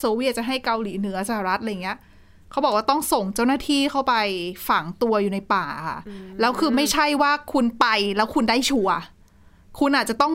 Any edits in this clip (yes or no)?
no